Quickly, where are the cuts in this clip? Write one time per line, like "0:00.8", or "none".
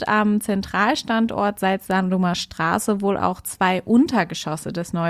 none